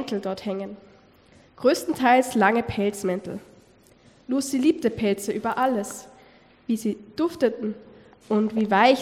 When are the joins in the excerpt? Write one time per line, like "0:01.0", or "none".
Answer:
none